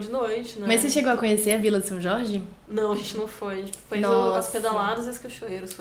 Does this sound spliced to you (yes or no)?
no